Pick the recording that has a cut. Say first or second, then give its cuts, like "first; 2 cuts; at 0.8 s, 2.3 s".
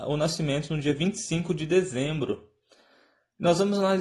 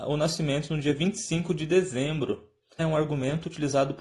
second; 1 cut; at 2.8 s